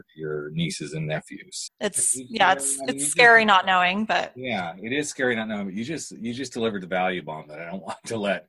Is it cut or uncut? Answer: cut